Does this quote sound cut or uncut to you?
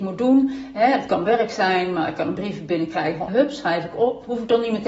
cut